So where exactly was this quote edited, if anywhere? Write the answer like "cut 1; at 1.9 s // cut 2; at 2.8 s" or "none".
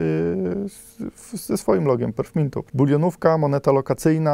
cut 1; at 2.7 s